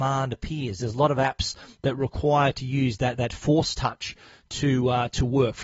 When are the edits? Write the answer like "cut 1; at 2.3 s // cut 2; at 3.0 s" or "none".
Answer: none